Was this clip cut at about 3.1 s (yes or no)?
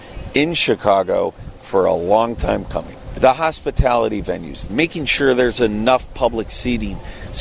yes